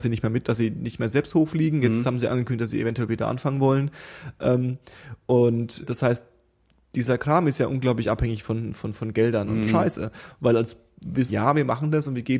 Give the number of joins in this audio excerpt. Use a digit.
3